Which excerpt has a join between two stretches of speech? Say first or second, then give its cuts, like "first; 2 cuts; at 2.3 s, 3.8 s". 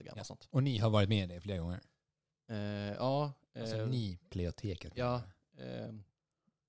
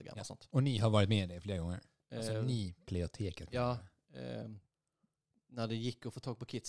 second; 1 cut; at 2.0 s